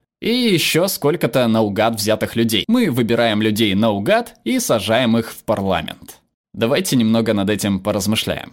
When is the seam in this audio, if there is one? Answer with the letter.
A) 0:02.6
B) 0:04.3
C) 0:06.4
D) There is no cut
A